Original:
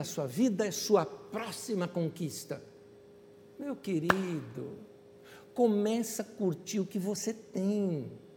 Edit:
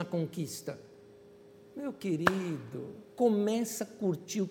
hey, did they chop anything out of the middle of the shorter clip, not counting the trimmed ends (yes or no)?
yes